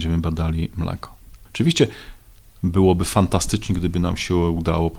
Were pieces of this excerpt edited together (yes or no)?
yes